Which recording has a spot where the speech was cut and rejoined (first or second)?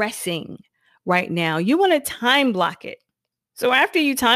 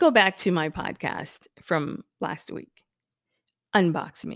first